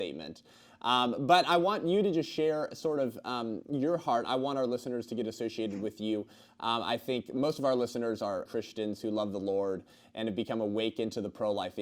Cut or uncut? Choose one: cut